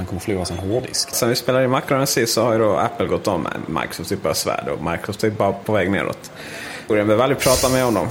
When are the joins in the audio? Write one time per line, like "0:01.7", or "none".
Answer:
0:01.1
0:06.9